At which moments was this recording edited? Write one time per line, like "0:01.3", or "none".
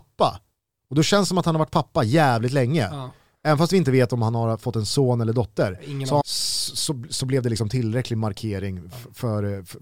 0:06.2